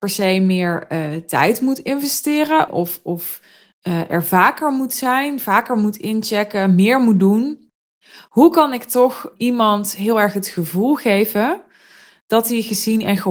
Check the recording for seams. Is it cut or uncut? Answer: cut